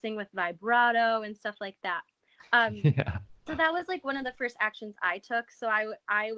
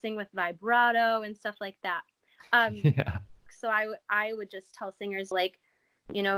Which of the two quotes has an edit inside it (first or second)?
second